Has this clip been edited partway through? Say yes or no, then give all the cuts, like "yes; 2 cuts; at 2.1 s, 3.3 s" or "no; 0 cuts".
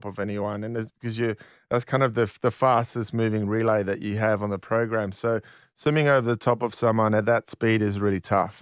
no; 0 cuts